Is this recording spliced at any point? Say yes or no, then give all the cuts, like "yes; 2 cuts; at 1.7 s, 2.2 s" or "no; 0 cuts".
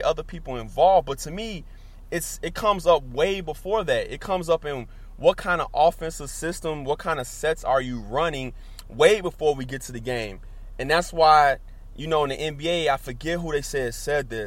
no; 0 cuts